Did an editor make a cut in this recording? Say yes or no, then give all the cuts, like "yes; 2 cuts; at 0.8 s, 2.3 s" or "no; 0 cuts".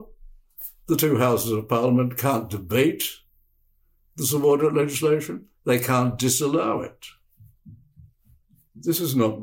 no; 0 cuts